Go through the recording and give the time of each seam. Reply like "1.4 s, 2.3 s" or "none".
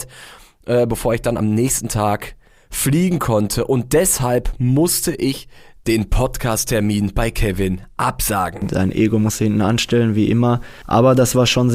none